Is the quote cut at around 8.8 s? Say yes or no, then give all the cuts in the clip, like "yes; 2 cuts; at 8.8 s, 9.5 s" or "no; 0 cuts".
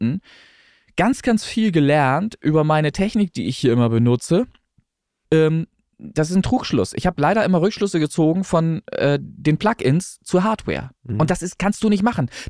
no; 2 cuts; at 5.2 s, 11.0 s